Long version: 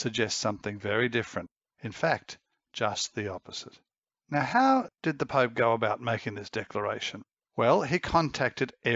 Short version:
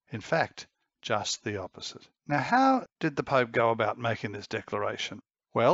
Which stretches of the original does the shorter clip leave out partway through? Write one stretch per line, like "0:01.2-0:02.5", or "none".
0:03.9-0:04.2